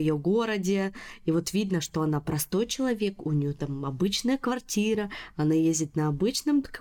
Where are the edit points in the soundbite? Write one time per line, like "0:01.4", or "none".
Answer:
none